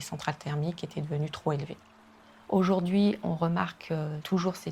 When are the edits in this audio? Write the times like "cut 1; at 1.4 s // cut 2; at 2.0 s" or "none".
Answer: none